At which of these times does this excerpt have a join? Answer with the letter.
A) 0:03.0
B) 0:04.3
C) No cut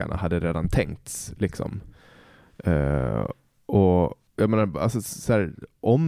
B